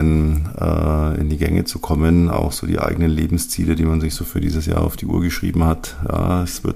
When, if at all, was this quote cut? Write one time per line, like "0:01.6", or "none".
none